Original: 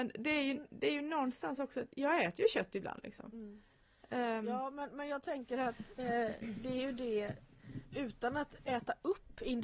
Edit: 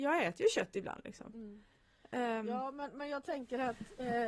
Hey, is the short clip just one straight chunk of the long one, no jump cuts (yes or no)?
yes